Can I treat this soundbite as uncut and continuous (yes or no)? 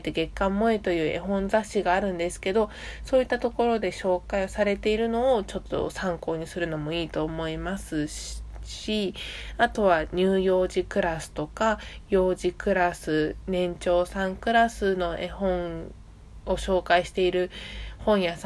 yes